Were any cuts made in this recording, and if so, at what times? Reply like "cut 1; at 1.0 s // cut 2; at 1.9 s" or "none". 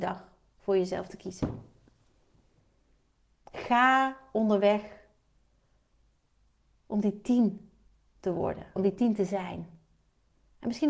cut 1; at 8.8 s